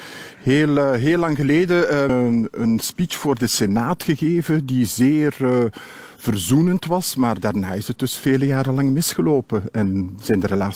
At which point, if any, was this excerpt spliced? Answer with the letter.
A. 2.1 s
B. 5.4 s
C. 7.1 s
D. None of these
A